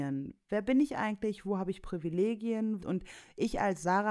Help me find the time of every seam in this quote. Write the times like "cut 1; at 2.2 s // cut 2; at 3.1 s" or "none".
cut 1; at 2.8 s